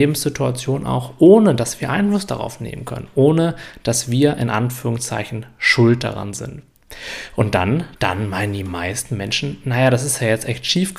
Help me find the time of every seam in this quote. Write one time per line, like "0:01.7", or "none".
0:08.0